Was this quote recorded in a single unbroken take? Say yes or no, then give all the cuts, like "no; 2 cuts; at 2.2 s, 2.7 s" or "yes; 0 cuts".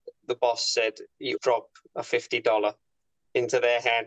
no; 1 cut; at 1.4 s